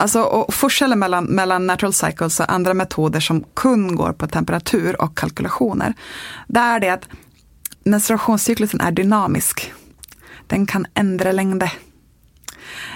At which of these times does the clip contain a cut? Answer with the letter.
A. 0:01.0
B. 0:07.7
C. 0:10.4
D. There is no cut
B